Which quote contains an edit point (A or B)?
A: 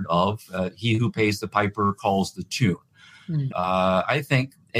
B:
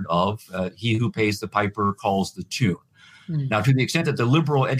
A